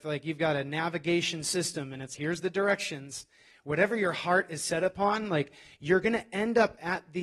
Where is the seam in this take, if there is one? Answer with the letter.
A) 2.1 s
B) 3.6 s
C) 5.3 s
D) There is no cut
A